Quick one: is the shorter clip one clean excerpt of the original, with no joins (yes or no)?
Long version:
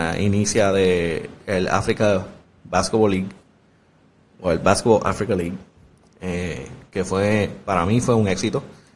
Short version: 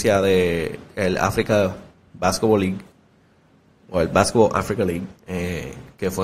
no